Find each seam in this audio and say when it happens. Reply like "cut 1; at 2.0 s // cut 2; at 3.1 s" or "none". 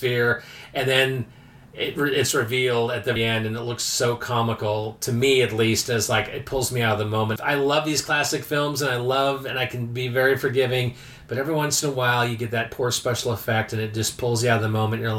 cut 1; at 3.2 s